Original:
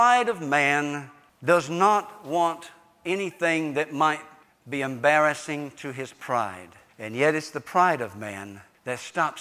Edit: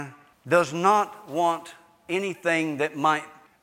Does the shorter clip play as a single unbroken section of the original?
yes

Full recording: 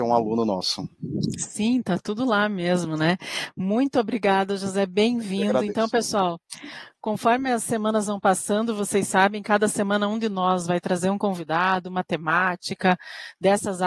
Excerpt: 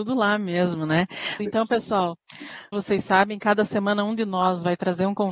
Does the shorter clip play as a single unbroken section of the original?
no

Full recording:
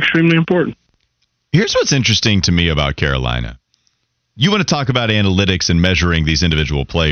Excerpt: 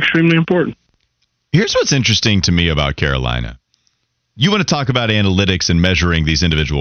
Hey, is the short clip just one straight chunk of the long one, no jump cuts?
yes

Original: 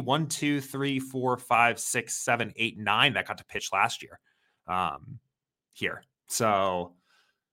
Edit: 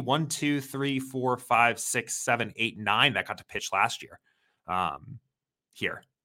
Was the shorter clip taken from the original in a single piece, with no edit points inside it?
yes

